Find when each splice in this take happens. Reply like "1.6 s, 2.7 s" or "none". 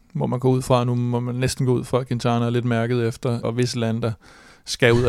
3.4 s